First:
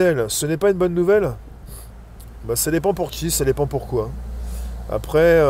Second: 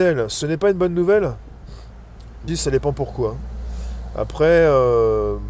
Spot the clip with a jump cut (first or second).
second